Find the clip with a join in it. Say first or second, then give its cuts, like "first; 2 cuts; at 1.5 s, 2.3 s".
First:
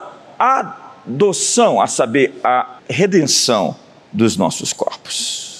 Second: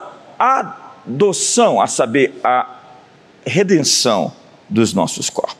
first; 1 cut; at 2.8 s